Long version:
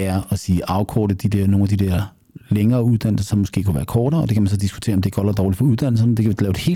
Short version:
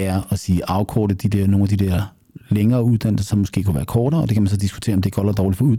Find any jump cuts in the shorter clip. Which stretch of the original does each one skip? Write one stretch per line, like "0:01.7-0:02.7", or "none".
none